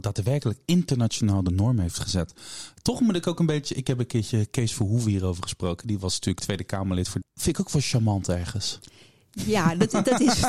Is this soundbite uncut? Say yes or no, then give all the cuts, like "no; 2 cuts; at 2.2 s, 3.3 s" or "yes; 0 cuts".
no; 1 cut; at 7.2 s